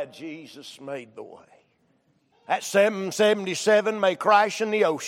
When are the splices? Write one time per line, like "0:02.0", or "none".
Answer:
0:02.3